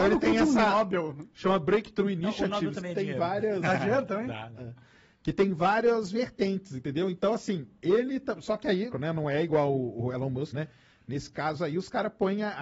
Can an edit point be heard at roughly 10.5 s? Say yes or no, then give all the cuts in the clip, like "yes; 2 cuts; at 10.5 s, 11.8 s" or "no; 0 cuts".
yes; 2 cuts; at 8.9 s, 10.5 s